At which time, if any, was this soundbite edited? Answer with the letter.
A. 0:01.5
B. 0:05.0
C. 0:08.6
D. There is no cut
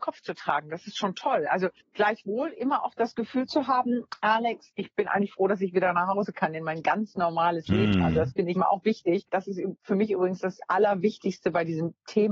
C